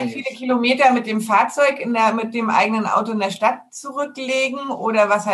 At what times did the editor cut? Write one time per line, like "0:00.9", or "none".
none